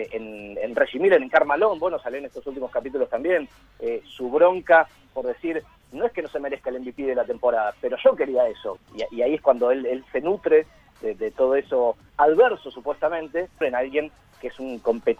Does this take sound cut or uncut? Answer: cut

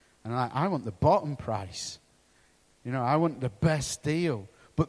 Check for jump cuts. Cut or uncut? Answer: uncut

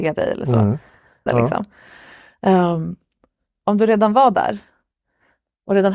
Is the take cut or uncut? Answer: cut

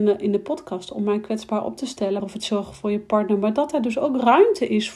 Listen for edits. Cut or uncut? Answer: cut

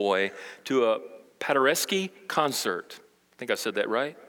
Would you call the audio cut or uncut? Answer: uncut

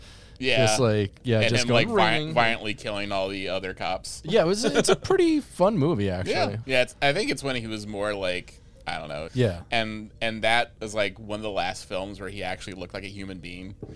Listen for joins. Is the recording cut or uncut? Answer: cut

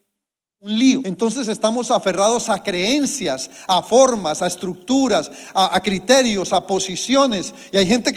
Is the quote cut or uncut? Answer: cut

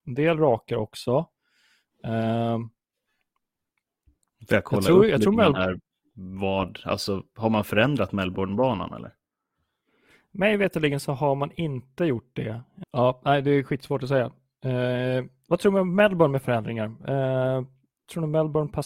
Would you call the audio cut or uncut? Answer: cut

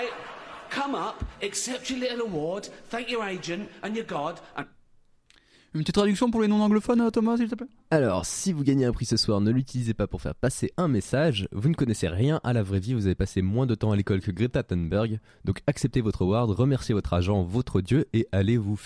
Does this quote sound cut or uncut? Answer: uncut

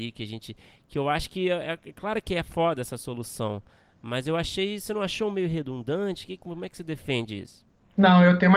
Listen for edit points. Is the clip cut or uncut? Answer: uncut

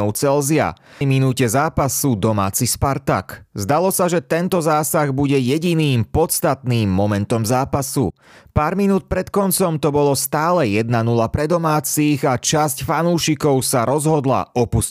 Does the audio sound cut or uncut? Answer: cut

